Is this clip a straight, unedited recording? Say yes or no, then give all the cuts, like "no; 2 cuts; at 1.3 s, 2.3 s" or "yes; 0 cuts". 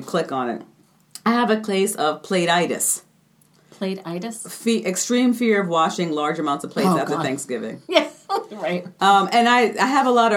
yes; 0 cuts